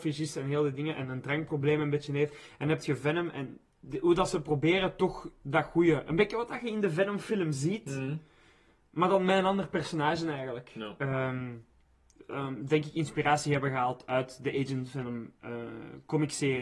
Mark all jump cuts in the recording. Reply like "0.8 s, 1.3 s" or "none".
12.1 s